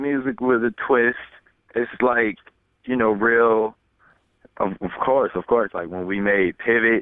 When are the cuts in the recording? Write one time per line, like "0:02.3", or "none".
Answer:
0:04.4
0:05.7